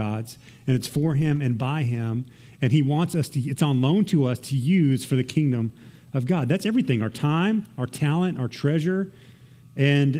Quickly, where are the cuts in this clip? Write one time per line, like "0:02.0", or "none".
none